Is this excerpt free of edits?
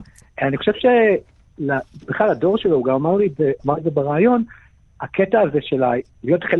yes; 0 cuts

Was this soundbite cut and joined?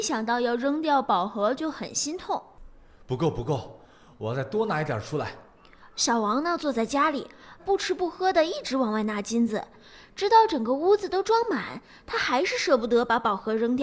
yes; 1 cut; at 7.6 s

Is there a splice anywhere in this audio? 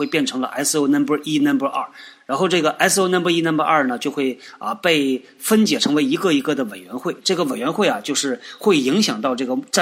no; 0 cuts

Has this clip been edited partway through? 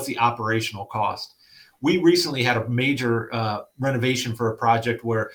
no; 0 cuts

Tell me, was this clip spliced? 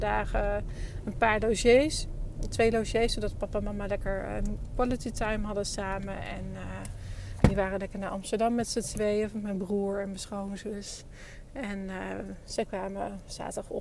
no; 0 cuts

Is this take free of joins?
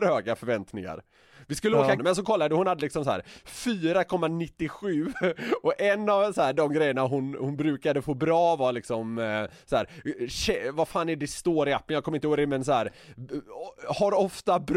no; 1 cut; at 2.0 s

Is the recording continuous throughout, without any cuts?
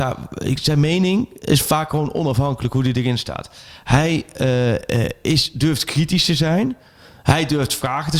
yes; 0 cuts

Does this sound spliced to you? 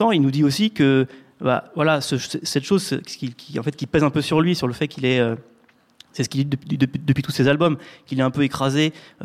no; 0 cuts

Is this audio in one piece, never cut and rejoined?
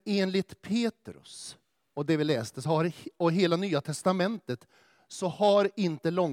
yes; 0 cuts

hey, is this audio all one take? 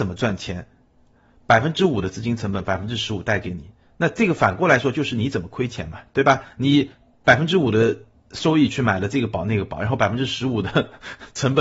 yes; 0 cuts

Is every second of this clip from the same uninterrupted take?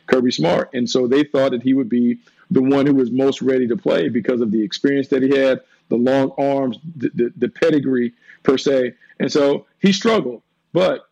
yes; 0 cuts

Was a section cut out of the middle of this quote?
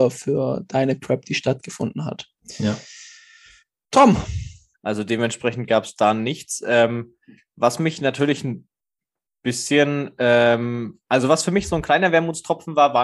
yes; 1 cut; at 4.7 s

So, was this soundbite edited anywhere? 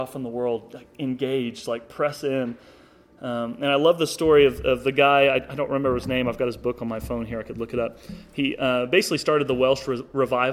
no; 0 cuts

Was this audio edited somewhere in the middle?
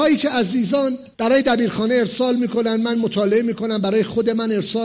yes; 1 cut; at 1.1 s

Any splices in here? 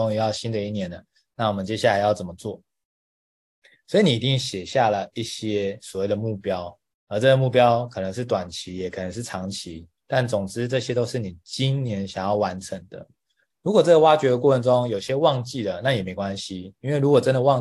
yes; 1 cut; at 13.5 s

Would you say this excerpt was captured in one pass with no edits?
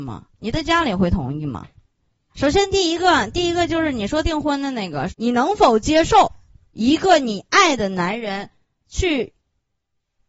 no; 2 cuts; at 2.3 s, 5.1 s

